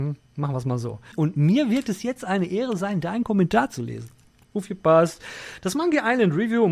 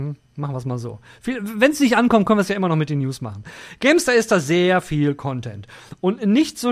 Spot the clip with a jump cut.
first; 2 cuts; at 1.1 s, 4.4 s

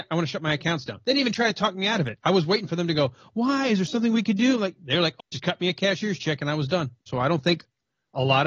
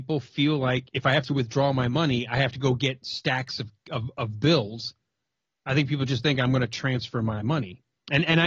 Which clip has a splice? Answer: first; 2 cuts; at 5.2 s, 7.1 s

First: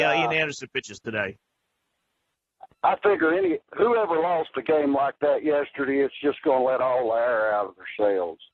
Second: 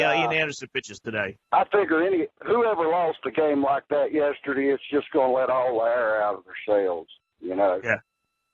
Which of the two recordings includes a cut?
second; 1 cut; at 1.4 s

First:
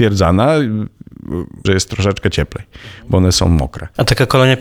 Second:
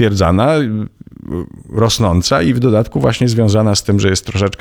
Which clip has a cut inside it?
first; 1 cut; at 1.7 s

